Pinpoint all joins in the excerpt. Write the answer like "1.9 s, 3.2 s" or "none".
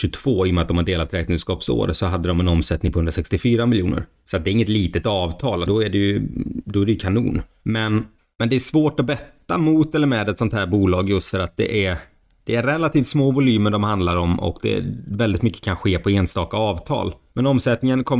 5.7 s